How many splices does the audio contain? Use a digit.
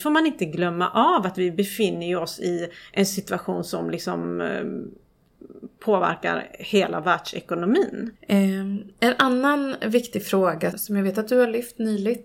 2